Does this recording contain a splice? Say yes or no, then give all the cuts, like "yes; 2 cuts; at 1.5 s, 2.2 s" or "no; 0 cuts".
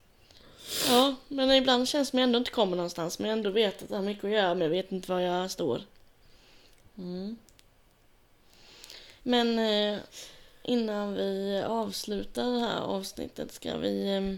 yes; 2 cuts; at 6.8 s, 9.2 s